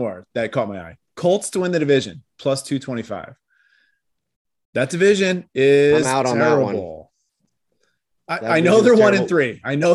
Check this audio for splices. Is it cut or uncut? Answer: uncut